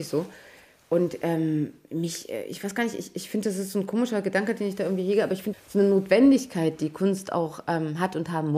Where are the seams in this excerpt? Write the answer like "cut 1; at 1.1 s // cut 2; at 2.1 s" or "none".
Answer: cut 1; at 5.5 s